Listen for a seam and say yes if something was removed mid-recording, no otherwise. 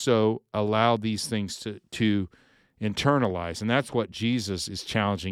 no